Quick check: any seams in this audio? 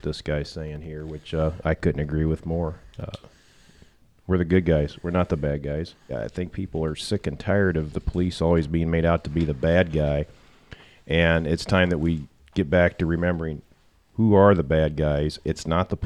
yes; 1 cut; at 6.1 s

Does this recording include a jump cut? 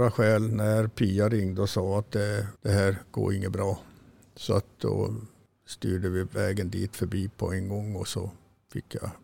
yes; 1 cut; at 2.5 s

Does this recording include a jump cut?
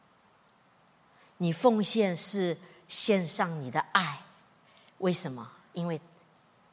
no; 0 cuts

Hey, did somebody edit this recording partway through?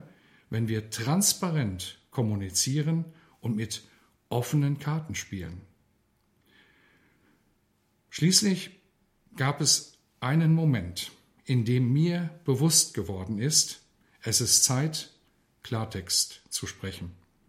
no; 0 cuts

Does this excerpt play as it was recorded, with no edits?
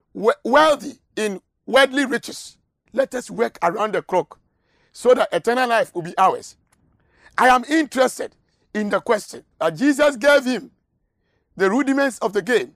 no; 2 cuts; at 2.9 s, 9.5 s

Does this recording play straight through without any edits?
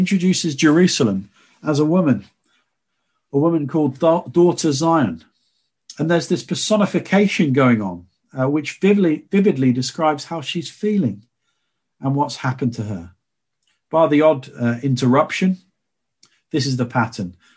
yes; 0 cuts

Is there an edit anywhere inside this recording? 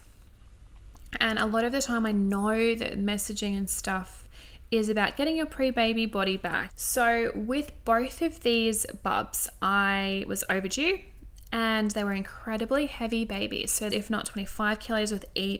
yes; 2 cuts; at 6.7 s, 13.9 s

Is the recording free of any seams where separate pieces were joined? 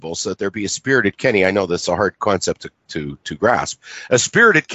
yes; 0 cuts

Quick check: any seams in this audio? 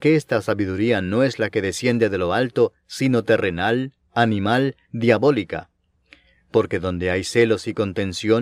no; 0 cuts

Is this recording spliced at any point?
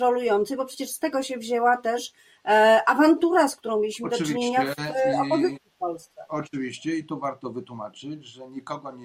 no; 0 cuts

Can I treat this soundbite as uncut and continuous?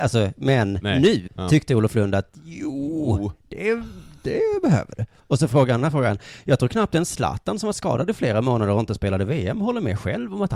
no; 1 cut; at 1.3 s

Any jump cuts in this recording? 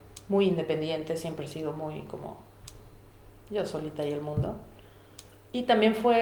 no; 0 cuts

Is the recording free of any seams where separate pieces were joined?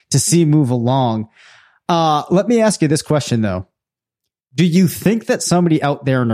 yes; 0 cuts

